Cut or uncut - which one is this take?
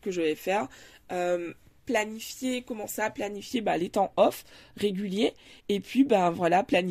uncut